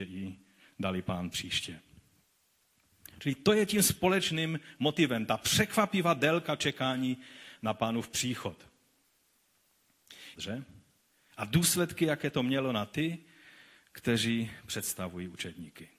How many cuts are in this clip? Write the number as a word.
one